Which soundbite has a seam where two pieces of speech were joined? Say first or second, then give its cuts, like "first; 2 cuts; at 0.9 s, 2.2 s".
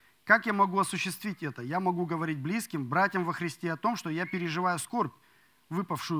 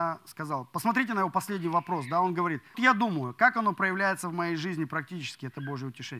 second; 1 cut; at 2.7 s